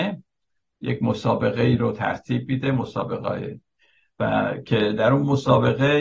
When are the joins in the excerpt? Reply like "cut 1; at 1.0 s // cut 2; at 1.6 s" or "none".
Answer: none

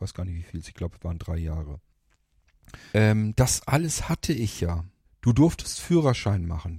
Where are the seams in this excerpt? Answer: cut 1; at 2.9 s // cut 2; at 5.0 s

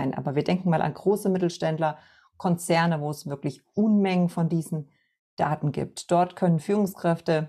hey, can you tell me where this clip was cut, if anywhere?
none

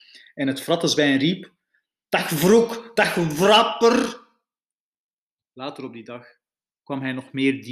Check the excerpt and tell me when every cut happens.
cut 1; at 5.4 s

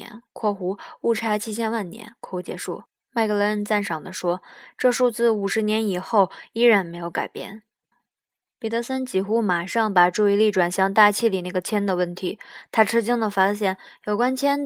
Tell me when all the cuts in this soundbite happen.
cut 1; at 7.9 s

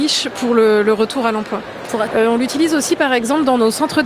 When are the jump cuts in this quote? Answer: cut 1; at 2.1 s

